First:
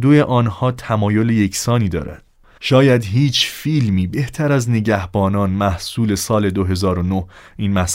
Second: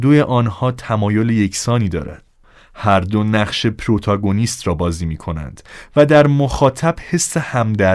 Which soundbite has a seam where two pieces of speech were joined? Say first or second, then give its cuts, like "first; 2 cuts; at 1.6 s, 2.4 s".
first; 1 cut; at 2.6 s